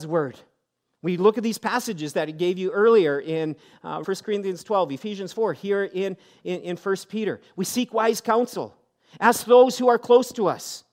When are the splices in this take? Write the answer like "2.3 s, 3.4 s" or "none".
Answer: 4.0 s